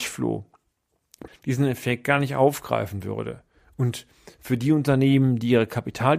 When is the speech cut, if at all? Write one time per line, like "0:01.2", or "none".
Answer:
0:01.3